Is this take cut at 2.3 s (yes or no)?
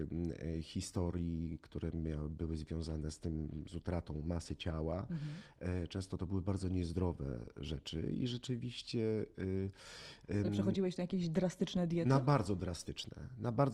no